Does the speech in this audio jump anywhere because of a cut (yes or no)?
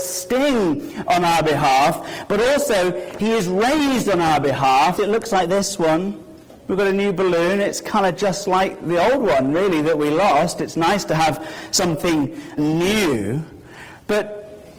yes